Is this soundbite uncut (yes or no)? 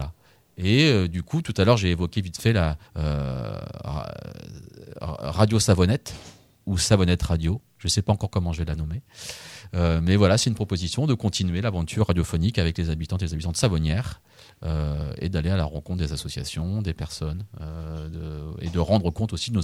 no